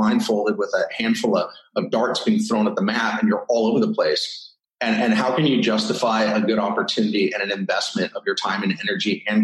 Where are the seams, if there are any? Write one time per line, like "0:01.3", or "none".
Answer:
none